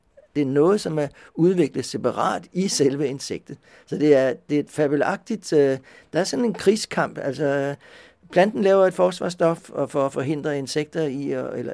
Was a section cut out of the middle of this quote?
no; 0 cuts

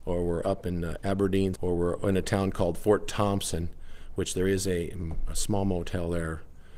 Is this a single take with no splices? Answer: no; 1 cut; at 1.6 s

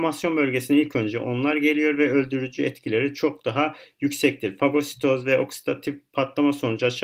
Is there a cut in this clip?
no; 0 cuts

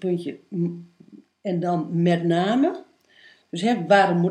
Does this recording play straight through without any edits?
yes; 0 cuts

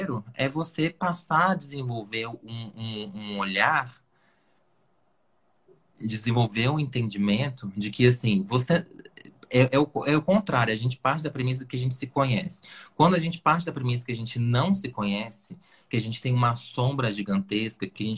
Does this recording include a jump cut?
no; 0 cuts

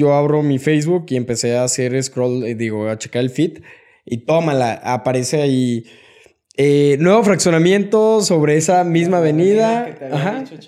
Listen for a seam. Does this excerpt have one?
no; 0 cuts

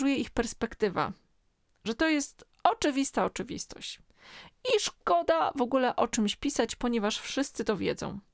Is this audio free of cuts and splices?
yes; 0 cuts

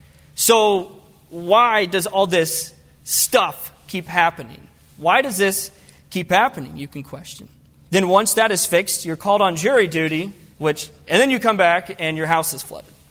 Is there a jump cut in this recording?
yes; 2 cuts; at 7.9 s, 10.5 s

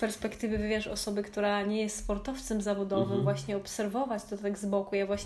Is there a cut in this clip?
no; 0 cuts

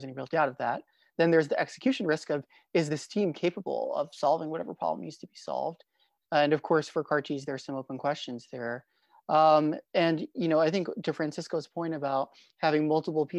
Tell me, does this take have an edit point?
yes; 1 cut; at 6.2 s

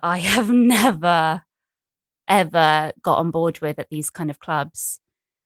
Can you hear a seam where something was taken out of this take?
no; 0 cuts

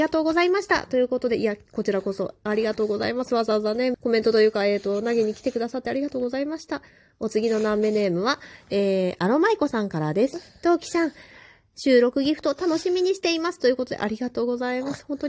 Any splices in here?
yes; 1 cut; at 3.9 s

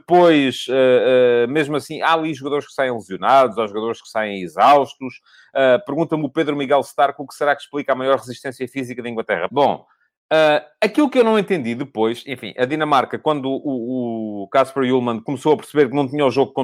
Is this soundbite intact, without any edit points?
no; 1 cut; at 9.5 s

